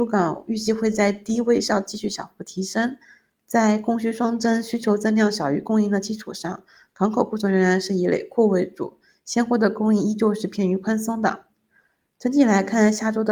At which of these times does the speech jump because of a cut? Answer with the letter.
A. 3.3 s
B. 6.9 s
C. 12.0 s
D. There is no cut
D